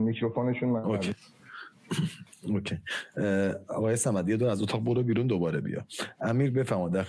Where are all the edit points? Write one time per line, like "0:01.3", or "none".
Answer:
none